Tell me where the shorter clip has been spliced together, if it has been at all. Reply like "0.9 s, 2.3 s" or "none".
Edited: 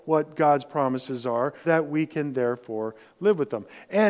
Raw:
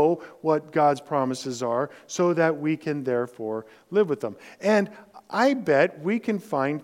1.6 s